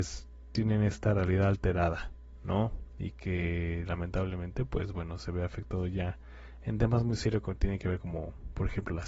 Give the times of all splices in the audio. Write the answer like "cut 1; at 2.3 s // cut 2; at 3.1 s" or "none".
none